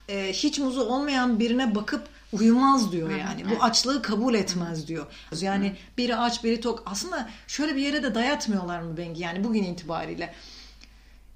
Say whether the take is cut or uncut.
cut